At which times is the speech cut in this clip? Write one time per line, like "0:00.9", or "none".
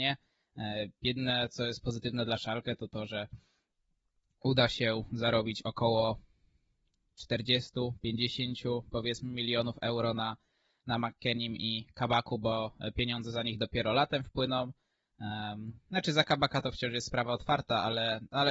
none

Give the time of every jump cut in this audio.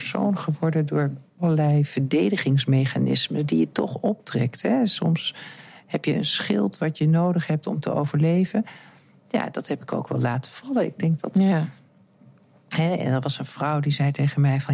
none

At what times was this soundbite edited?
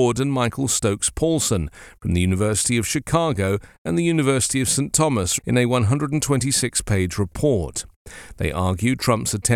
0:05.4

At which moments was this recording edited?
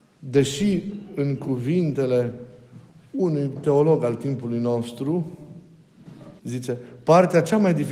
0:06.4

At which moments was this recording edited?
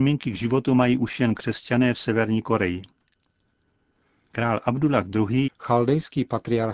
0:05.5

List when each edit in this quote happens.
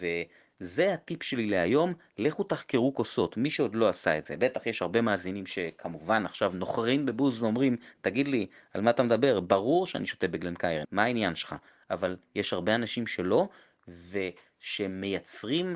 0:10.8

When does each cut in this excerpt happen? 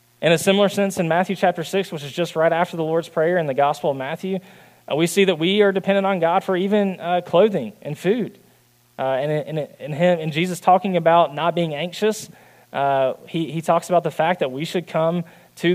none

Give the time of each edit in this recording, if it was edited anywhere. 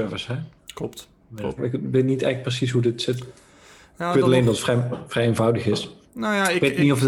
0:01.6

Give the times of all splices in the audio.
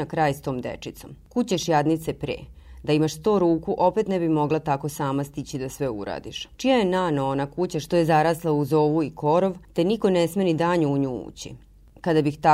0:06.5

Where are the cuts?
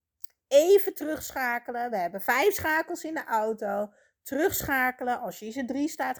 none

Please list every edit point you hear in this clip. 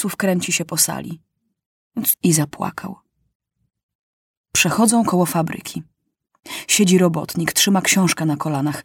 0:02.1

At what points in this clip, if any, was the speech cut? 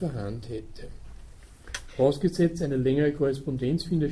none

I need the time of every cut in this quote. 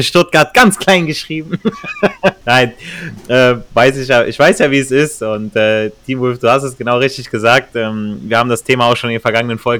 none

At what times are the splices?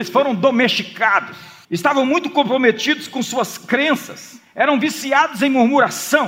0:01.6

